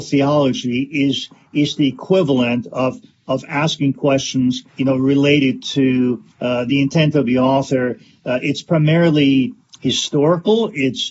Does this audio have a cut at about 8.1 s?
no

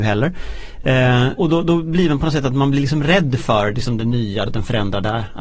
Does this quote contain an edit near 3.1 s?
no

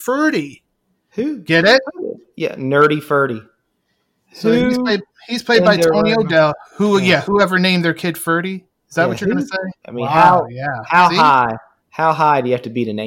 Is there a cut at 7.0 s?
no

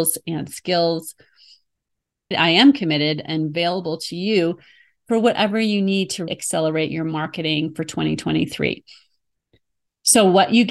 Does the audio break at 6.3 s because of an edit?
yes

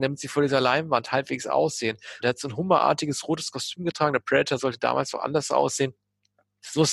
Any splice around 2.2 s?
yes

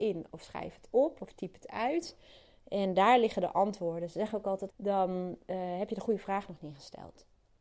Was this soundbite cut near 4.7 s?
yes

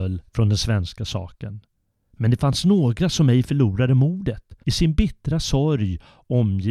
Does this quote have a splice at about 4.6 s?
yes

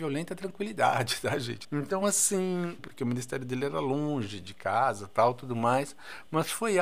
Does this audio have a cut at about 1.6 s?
yes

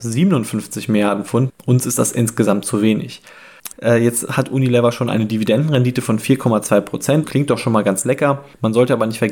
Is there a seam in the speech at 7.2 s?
yes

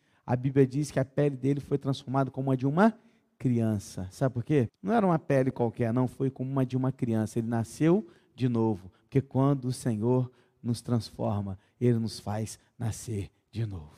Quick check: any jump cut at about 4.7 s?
yes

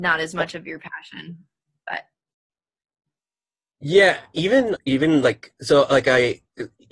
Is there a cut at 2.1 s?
no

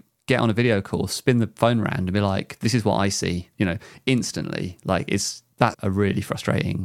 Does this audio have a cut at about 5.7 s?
yes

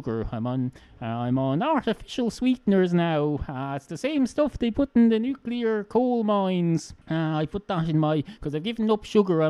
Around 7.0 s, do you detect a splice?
yes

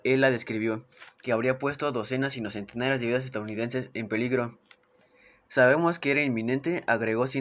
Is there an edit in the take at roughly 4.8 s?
no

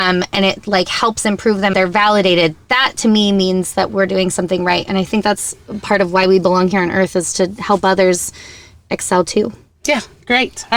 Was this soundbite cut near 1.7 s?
yes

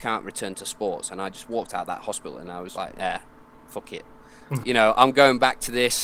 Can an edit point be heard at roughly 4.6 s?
yes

